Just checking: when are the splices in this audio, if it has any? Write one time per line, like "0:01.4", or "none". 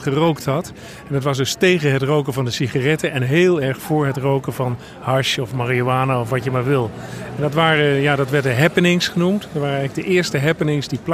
none